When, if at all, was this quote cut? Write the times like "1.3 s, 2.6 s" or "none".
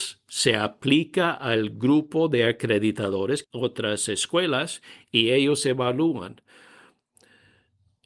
3.4 s